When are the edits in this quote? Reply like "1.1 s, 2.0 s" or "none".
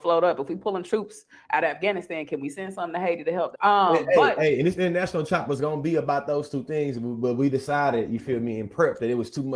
3.5 s